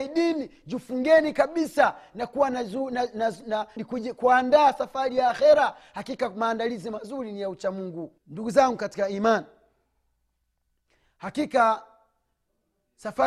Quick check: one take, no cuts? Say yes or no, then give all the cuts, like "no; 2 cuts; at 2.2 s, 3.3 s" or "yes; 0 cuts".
no; 2 cuts; at 3.8 s, 8.2 s